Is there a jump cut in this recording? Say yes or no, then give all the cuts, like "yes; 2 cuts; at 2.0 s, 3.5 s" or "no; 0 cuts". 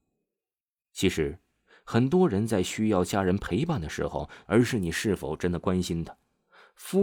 yes; 1 cut; at 4.5 s